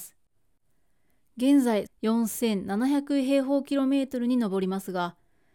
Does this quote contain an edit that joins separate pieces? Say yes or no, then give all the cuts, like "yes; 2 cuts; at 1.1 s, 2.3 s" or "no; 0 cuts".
yes; 1 cut; at 1.9 s